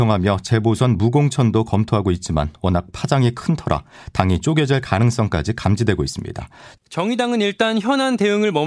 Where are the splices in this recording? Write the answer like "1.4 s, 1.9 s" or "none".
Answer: 6.8 s